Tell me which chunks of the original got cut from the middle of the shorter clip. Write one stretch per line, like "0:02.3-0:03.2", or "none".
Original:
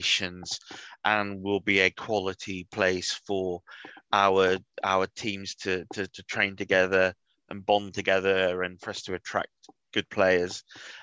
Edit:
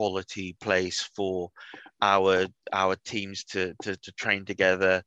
none